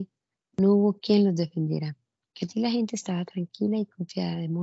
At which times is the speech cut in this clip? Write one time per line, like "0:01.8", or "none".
0:02.3